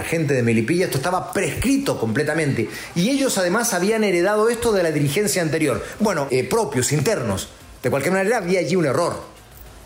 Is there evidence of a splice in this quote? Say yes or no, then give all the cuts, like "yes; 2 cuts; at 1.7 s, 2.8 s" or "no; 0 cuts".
yes; 1 cut; at 6.3 s